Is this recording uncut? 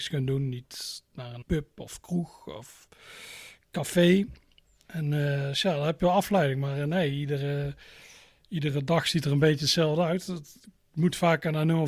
no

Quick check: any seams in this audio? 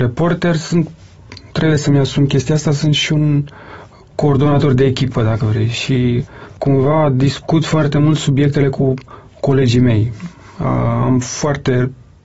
no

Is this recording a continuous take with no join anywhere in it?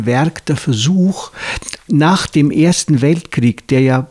no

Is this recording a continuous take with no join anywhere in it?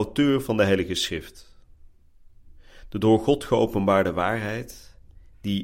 yes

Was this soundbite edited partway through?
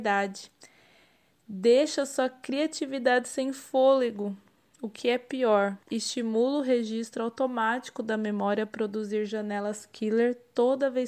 yes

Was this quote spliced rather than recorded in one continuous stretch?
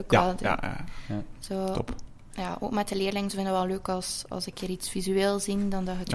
no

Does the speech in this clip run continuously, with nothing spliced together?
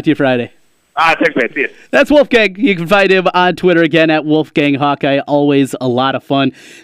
yes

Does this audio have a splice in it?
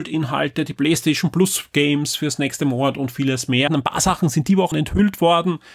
yes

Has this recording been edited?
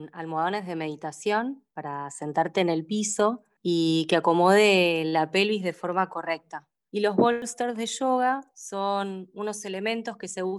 yes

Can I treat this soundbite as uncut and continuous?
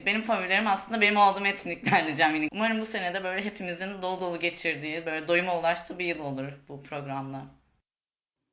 no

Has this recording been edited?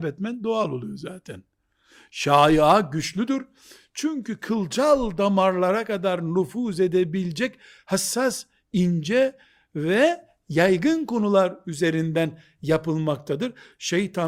no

